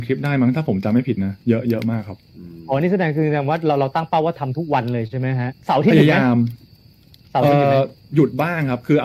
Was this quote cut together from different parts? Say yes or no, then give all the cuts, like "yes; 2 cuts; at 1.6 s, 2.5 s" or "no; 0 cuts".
yes; 1 cut; at 5.6 s